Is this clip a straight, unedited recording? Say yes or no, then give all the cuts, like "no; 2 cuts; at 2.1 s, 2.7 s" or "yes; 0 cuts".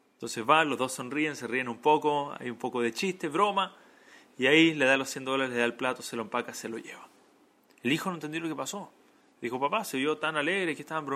yes; 0 cuts